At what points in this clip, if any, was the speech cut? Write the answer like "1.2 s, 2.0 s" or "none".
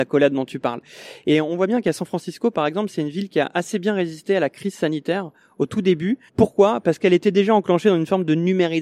6.3 s